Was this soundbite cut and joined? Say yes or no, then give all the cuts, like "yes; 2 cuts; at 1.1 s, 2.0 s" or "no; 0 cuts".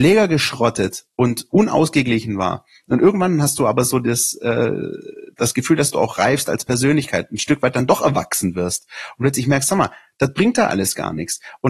no; 0 cuts